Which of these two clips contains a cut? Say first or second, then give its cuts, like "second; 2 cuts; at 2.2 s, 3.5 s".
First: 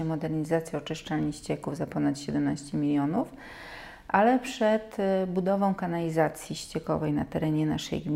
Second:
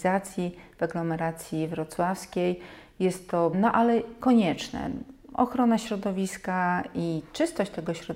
second; 1 cut; at 3.5 s